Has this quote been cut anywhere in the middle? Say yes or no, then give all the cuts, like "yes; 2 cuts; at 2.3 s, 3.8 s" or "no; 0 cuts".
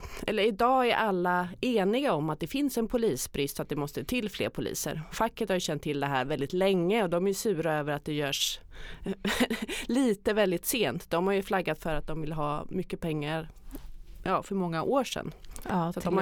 no; 0 cuts